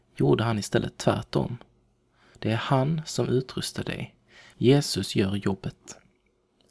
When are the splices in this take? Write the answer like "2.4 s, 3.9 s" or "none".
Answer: 2.3 s, 4.5 s